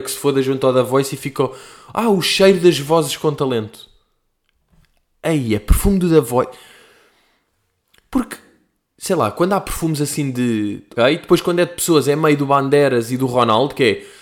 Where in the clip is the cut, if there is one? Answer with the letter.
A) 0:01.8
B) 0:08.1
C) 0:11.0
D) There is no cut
C